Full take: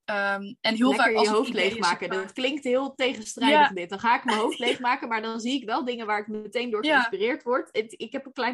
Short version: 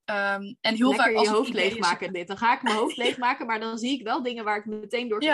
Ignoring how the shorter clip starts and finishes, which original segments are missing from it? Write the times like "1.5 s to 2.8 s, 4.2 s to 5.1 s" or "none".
2.1 s to 3.7 s